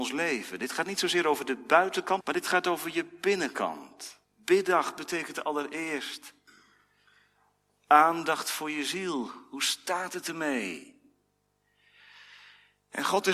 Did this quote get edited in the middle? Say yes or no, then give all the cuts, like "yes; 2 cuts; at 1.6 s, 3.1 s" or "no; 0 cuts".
yes; 2 cuts; at 2.2 s, 4.2 s